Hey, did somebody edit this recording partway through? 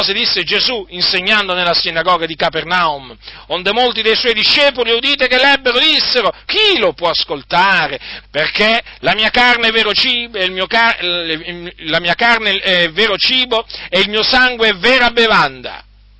yes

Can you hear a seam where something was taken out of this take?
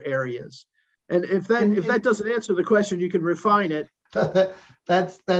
yes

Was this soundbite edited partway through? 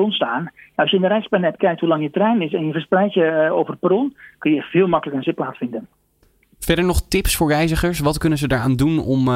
yes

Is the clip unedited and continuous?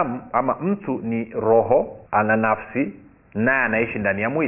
no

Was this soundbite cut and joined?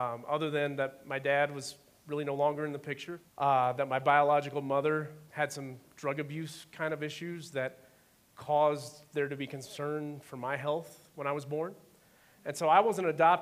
yes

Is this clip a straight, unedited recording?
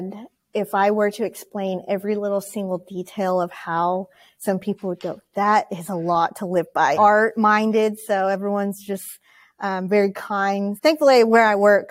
no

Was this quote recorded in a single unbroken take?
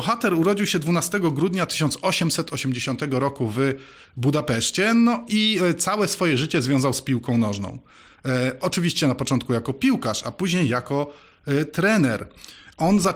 yes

